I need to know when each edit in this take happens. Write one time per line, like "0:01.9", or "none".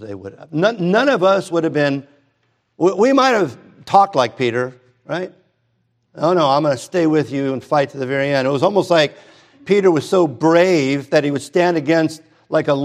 none